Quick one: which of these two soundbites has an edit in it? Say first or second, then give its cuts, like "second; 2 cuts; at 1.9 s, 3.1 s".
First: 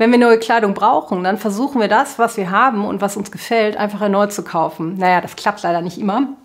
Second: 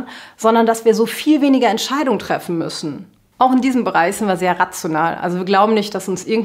second; 1 cut; at 3.2 s